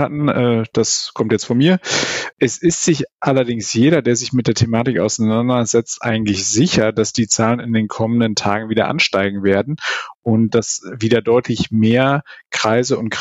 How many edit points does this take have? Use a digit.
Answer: 2